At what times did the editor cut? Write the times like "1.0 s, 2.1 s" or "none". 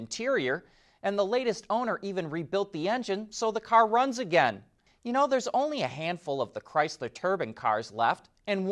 4.9 s